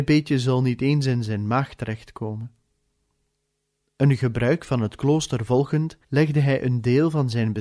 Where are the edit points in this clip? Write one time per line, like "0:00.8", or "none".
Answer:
0:03.8
0:06.0